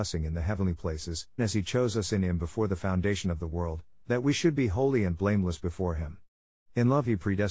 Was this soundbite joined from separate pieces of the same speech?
yes; 1 cut; at 1.4 s

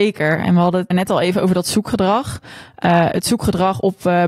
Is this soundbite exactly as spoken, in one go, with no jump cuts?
no; 1 cut; at 0.9 s

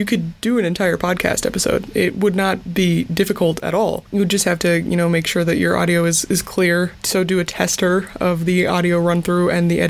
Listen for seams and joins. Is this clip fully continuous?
yes; 0 cuts

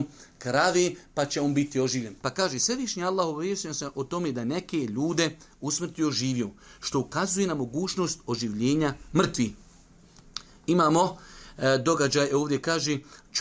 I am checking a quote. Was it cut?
yes; 1 cut; at 2.2 s

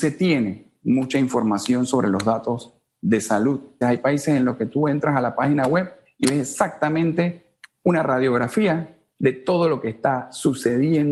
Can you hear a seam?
yes; 2 cuts; at 3.8 s, 9.1 s

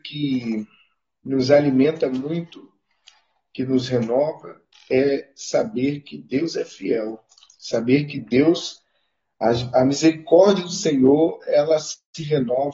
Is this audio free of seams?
yes; 0 cuts

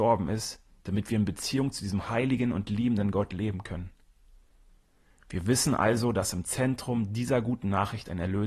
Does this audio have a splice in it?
no; 0 cuts

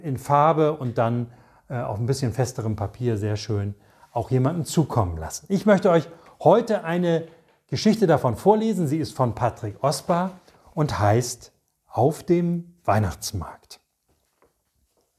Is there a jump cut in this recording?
no; 0 cuts

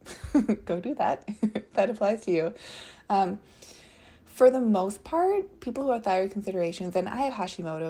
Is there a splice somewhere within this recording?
no; 0 cuts

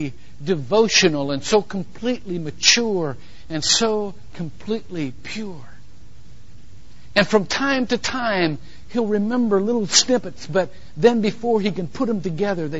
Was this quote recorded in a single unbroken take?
yes; 0 cuts

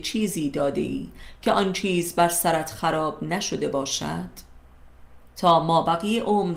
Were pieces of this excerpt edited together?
yes; 1 cut; at 5.2 s

